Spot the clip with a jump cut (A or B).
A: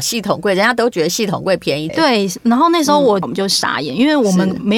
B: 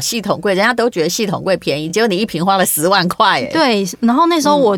A